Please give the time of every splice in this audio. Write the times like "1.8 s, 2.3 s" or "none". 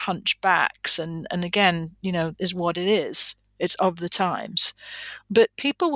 2.4 s